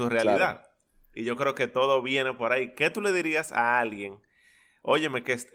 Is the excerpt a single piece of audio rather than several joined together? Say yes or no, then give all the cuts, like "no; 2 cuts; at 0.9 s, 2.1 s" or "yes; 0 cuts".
yes; 0 cuts